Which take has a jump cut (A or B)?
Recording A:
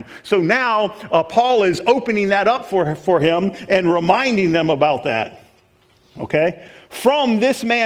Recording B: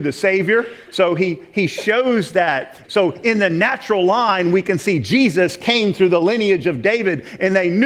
B